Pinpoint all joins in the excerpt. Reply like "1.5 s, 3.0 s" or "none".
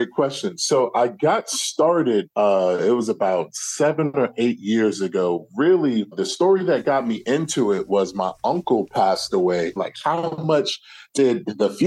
6.1 s, 9.8 s